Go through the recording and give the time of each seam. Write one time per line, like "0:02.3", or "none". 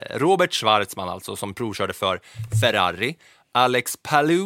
none